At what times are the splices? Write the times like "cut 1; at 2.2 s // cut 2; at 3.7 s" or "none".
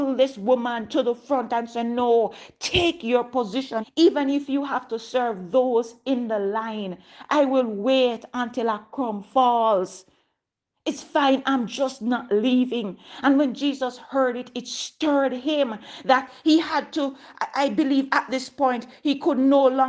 cut 1; at 3.8 s